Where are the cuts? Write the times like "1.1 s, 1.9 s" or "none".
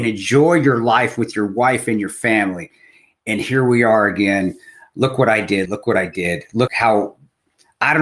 5.7 s, 6.7 s